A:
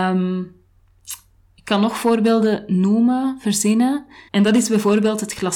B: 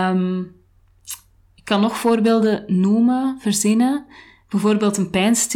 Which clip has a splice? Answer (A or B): A